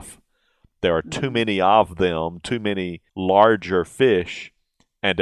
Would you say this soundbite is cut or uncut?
cut